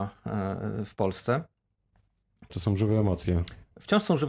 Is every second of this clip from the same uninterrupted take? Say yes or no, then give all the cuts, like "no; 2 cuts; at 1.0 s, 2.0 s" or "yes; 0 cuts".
no; 1 cut; at 2.5 s